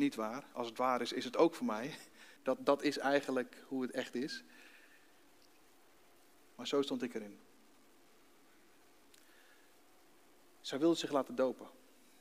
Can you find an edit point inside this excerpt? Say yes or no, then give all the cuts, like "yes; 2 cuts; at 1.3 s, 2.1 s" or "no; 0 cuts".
yes; 1 cut; at 2.4 s